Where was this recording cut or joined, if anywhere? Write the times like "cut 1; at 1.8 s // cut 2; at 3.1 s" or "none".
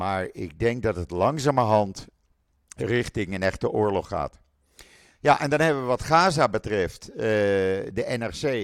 none